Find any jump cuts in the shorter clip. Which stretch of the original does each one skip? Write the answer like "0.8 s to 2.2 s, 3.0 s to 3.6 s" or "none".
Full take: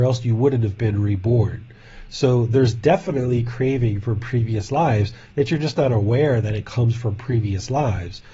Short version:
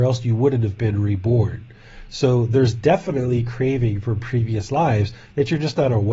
none